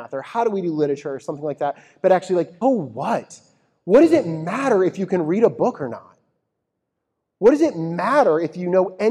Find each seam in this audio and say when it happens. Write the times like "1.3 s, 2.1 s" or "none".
2.6 s